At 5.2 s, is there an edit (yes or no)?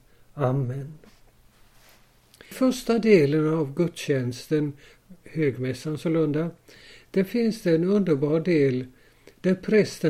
no